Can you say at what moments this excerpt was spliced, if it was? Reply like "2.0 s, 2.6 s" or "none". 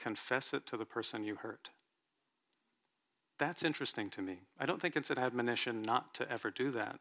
none

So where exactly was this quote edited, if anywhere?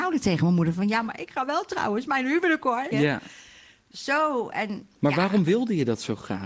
2.9 s, 5.0 s

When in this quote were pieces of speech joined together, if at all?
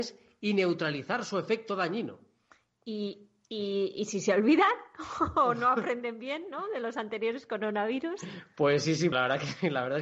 9.1 s

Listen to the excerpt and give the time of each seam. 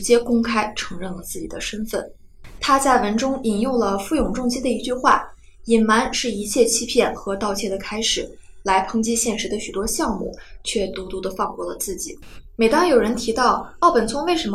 none

